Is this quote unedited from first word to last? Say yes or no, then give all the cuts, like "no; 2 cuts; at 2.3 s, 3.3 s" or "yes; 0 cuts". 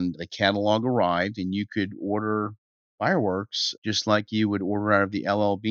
yes; 0 cuts